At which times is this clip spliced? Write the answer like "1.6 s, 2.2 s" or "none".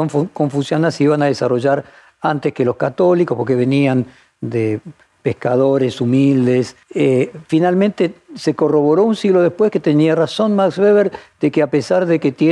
5.2 s, 6.8 s